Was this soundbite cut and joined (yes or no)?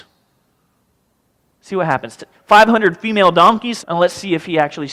yes